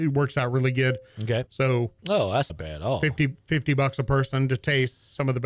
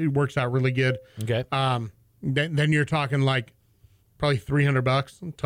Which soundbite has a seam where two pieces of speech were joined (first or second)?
first